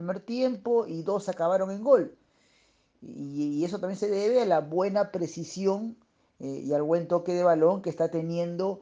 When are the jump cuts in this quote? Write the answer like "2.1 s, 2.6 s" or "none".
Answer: none